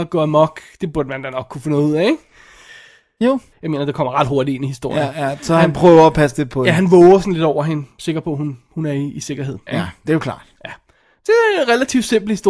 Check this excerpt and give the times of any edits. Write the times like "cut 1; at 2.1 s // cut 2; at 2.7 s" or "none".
cut 1; at 3.5 s // cut 2; at 9.7 s